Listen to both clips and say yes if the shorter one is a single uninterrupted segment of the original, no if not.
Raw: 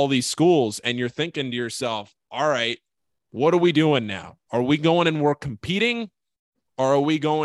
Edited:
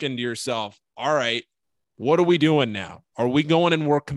yes